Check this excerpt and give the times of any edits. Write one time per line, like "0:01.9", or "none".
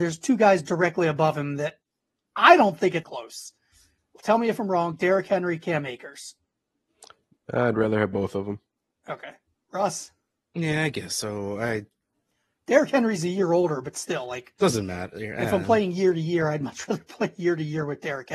0:03.0